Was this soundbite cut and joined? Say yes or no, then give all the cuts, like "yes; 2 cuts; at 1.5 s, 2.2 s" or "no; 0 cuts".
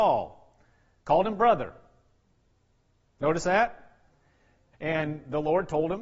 yes; 1 cut; at 4.7 s